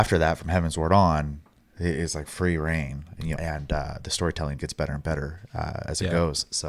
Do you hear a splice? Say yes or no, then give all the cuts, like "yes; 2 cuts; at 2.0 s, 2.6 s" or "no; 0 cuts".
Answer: yes; 2 cuts; at 3.4 s, 4.6 s